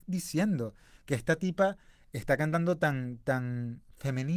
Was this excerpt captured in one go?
yes; 0 cuts

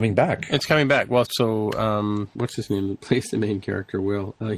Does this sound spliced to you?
yes; 1 cut; at 1.3 s

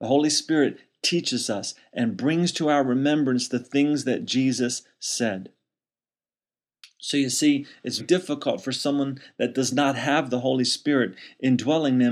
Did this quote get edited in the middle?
yes; 1 cut; at 8.0 s

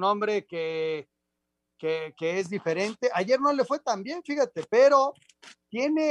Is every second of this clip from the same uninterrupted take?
yes; 0 cuts

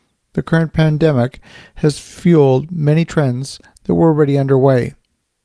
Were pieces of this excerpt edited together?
no; 0 cuts

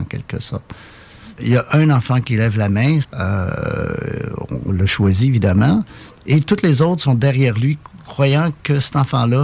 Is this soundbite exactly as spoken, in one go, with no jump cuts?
no; 2 cuts; at 1.3 s, 3.0 s

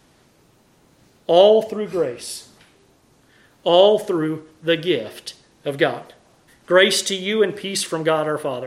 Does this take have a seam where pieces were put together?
yes; 1 cut; at 6.5 s

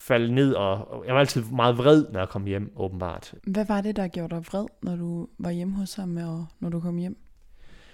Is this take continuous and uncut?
no; 1 cut; at 3.4 s

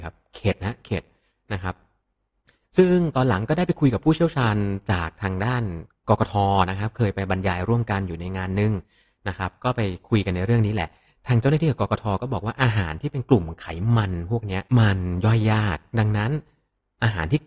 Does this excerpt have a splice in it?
yes; 1 cut; at 14.7 s

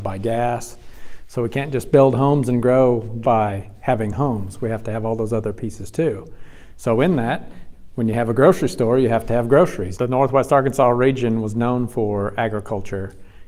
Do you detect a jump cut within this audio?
yes; 2 cuts; at 3.2 s, 9.9 s

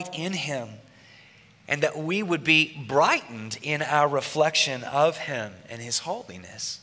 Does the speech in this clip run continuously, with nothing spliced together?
yes; 0 cuts

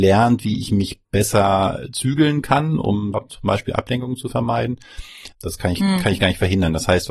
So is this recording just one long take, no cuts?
no; 2 cuts; at 3.1 s, 5.3 s

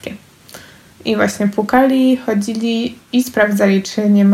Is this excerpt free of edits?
no; 1 cut; at 0.9 s

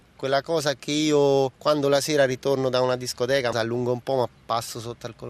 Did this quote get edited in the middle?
yes; 1 cut; at 3.5 s

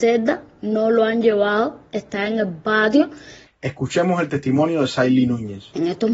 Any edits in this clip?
yes; 1 cut; at 3.5 s

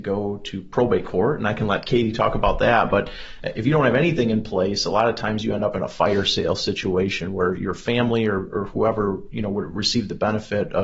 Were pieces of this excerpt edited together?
no; 0 cuts

